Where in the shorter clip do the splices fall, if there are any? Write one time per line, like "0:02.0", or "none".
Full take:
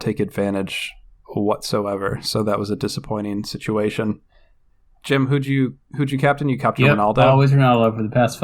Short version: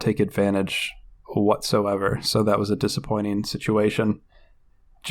none